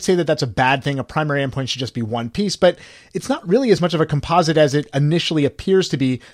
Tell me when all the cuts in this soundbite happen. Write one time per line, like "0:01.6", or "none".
none